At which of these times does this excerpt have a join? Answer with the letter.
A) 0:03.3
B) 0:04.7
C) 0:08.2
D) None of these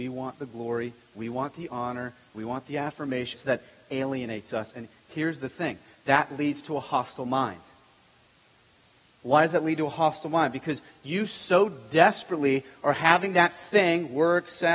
A